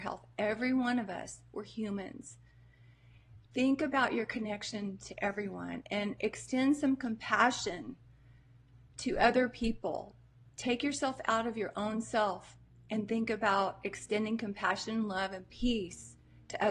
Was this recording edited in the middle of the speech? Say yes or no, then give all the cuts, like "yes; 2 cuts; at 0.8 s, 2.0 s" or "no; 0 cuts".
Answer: no; 0 cuts